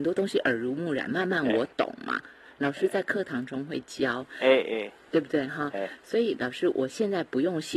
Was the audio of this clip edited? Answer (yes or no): no